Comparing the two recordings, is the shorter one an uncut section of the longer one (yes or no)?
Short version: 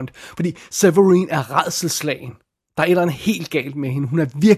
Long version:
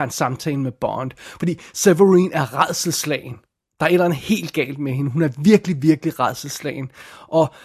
yes